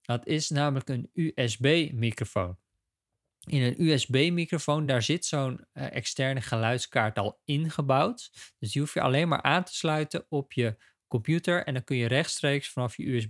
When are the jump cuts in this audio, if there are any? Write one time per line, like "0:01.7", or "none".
none